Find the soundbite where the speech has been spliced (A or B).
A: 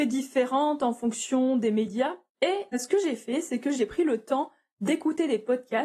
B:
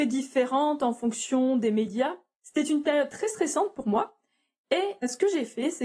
A